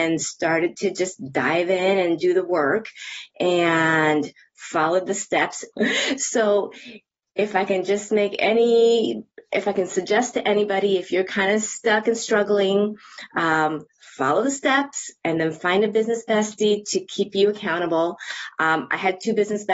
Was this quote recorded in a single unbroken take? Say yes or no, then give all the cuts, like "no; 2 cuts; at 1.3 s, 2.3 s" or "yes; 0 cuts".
no; 1 cut; at 5.7 s